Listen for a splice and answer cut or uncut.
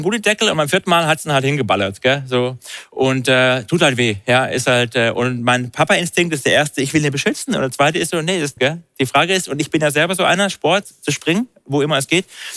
cut